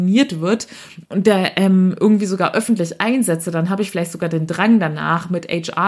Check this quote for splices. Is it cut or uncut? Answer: cut